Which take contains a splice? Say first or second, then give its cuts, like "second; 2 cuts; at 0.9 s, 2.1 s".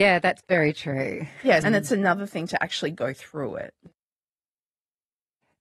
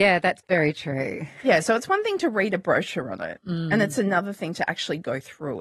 first; 1 cut; at 1.6 s